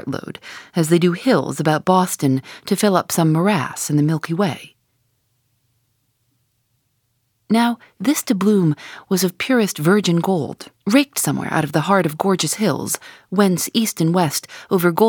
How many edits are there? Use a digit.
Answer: 1